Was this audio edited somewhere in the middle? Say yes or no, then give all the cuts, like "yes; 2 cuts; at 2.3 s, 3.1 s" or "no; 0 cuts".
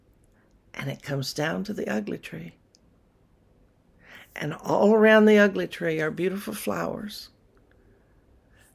no; 0 cuts